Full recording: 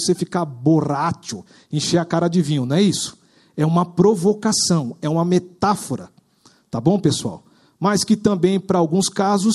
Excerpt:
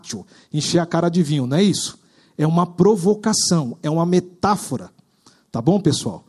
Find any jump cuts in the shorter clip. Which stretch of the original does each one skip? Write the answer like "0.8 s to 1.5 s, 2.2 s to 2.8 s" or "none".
none